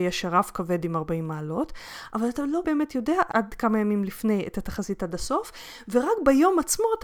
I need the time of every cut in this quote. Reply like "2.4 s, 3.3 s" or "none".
2.6 s

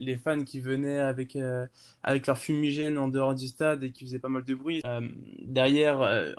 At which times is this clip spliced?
4.8 s

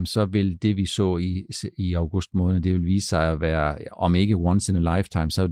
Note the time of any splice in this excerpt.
none

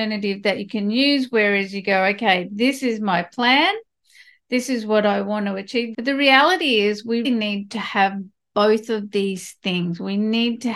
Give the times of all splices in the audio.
5.9 s, 7.2 s

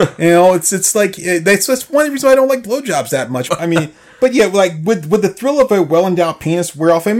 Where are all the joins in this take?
3.5 s

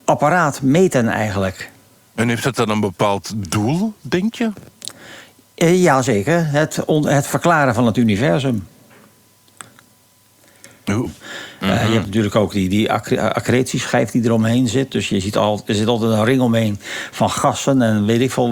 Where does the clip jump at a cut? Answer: 11.1 s

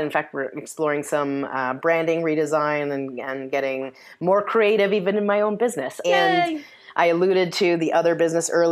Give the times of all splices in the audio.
6.0 s

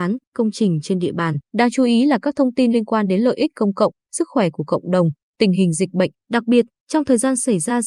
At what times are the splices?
1.4 s, 6.2 s

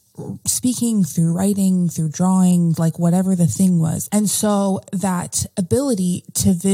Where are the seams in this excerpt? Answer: 2.8 s, 4.1 s

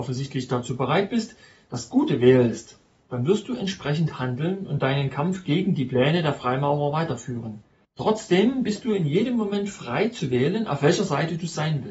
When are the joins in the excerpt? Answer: 7.8 s

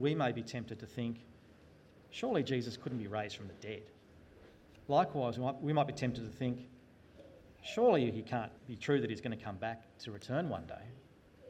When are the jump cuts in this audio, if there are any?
4.9 s, 8.5 s

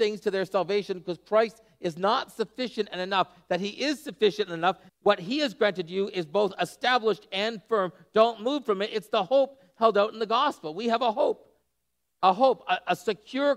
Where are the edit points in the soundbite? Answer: 4.9 s

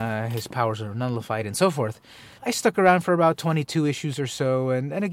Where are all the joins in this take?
2.4 s

